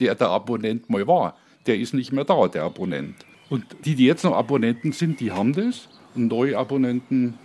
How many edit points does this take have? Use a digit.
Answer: 0